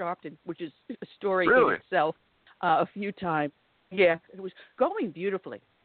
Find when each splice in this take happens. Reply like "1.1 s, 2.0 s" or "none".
4.3 s